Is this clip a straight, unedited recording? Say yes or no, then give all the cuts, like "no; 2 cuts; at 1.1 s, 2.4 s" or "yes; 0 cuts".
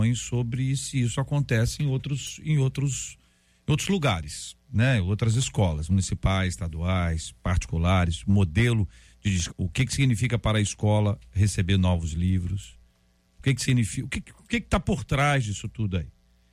no; 1 cut; at 9.5 s